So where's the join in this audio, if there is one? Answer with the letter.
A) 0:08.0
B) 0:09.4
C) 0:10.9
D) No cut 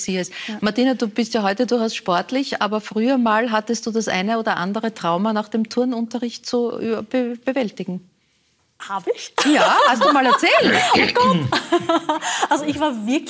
D